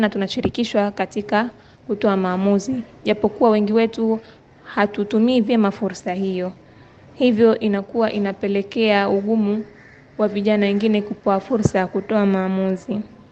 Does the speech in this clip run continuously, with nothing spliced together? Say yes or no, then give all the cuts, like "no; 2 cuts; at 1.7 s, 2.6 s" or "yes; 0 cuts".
yes; 0 cuts